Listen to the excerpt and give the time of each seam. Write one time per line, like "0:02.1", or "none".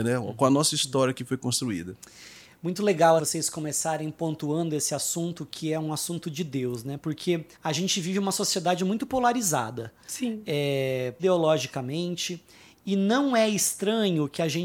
0:03.2
0:07.5
0:11.2